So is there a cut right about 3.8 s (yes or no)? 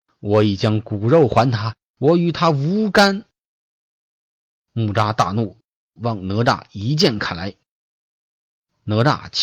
no